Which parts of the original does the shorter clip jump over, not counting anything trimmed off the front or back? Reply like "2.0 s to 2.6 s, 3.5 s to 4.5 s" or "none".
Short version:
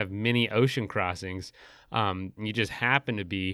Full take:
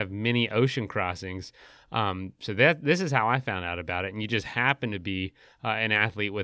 2.4 s to 4.1 s